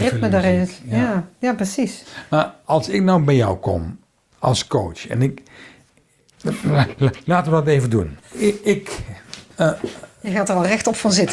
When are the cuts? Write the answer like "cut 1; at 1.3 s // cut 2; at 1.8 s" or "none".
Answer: cut 1; at 8.2 s // cut 2; at 9.5 s